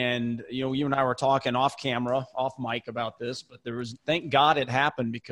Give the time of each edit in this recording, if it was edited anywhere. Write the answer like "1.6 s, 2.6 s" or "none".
none